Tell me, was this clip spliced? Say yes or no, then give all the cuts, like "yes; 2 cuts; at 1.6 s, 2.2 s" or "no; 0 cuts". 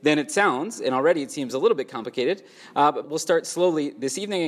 yes; 1 cut; at 3.0 s